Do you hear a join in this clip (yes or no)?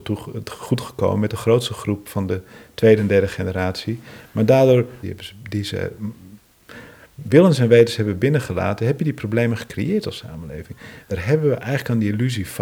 yes